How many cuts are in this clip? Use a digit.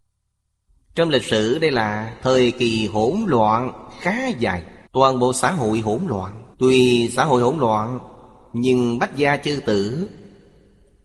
2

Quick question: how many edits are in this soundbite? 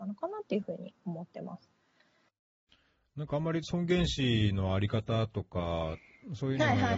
0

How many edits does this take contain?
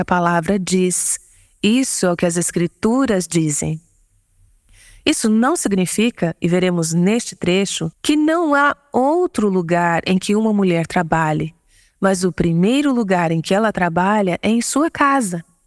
1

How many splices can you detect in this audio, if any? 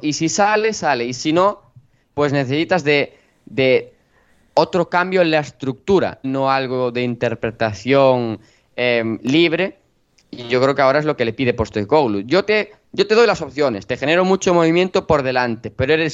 1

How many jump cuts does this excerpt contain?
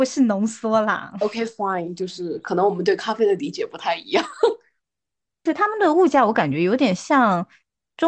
0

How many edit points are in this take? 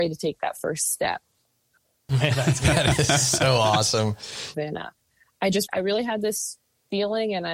3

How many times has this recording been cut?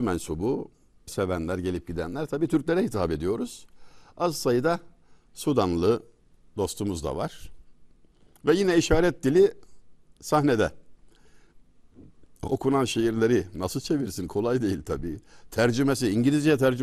1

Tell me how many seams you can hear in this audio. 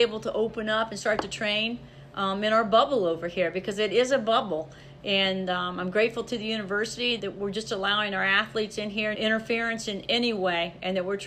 2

